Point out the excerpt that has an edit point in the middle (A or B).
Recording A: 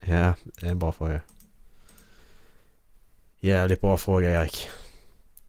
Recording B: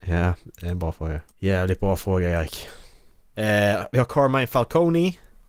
B